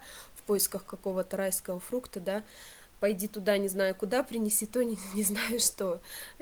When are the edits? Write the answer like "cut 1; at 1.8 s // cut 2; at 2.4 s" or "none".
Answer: none